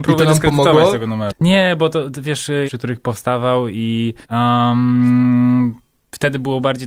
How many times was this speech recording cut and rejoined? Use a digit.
3